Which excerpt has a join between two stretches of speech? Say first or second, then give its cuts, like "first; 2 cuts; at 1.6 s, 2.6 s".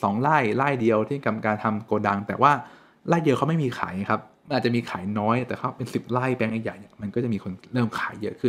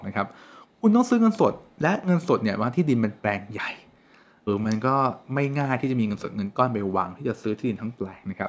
second; 1 cut; at 4.5 s